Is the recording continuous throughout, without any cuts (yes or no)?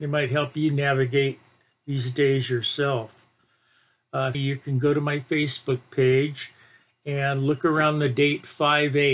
no